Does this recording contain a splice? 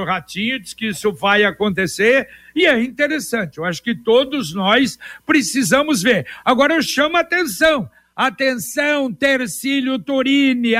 no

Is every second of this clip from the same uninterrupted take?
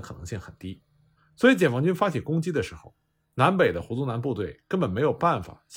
no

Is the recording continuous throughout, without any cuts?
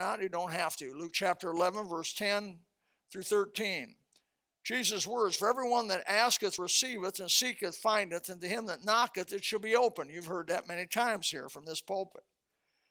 yes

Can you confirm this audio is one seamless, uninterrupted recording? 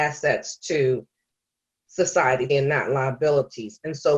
no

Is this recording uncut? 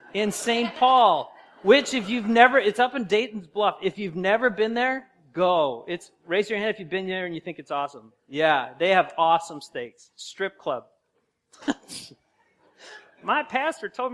yes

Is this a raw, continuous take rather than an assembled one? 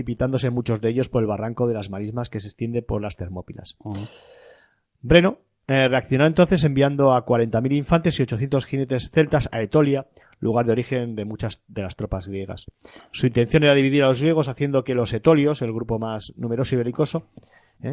yes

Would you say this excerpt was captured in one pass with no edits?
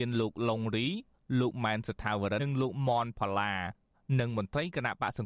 no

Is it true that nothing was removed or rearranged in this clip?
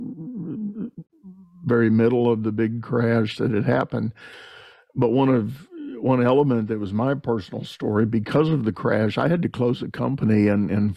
yes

